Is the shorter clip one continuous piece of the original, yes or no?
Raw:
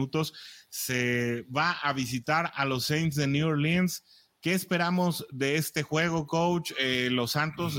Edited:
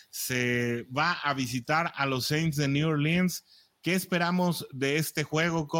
yes